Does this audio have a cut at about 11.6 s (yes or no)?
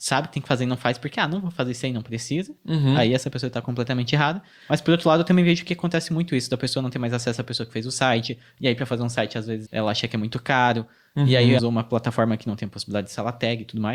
yes